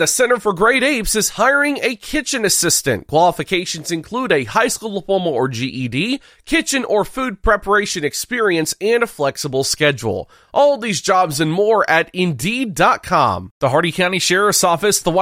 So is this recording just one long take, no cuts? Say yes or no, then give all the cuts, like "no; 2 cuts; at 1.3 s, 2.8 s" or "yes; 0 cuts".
yes; 0 cuts